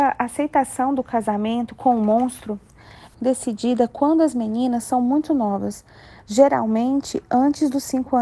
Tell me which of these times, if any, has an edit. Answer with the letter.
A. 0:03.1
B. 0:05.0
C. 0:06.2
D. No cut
A